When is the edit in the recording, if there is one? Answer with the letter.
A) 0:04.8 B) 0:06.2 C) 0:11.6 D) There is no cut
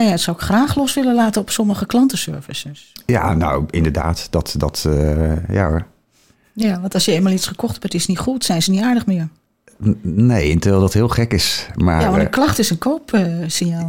D